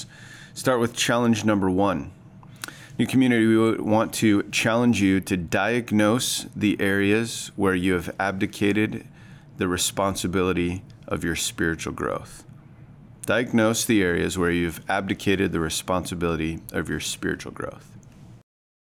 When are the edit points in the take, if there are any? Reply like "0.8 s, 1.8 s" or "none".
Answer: none